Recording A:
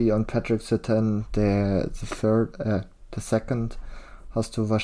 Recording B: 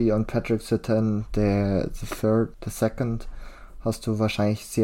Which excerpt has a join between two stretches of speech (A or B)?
B